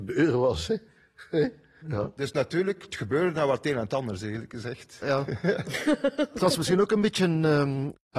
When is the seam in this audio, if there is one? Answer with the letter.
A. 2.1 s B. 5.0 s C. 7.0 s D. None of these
B